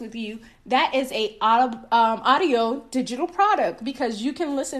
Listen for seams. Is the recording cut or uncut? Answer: uncut